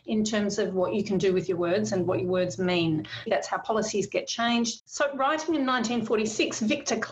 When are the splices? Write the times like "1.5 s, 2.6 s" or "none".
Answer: 3.3 s, 4.8 s